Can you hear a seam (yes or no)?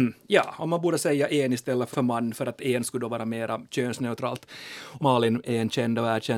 yes